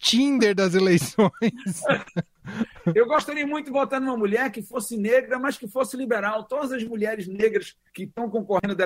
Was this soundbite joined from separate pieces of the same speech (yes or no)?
no